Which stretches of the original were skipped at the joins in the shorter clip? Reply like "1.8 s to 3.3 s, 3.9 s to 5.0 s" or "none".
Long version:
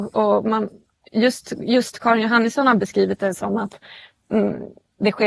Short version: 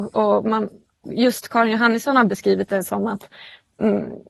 1.1 s to 1.6 s